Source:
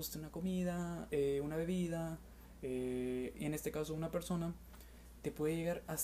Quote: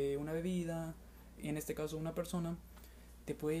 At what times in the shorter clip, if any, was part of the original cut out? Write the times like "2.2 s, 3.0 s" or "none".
1.4 s